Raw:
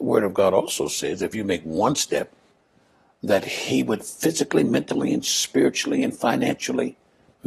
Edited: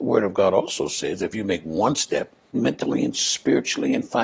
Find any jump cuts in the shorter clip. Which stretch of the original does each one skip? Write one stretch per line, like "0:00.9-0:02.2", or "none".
0:02.5-0:04.6